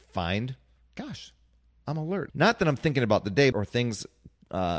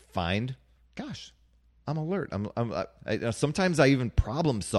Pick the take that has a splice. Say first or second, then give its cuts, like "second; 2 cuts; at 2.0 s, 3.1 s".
first; 2 cuts; at 2.3 s, 3.5 s